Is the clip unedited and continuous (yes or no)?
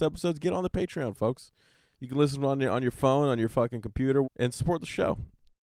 no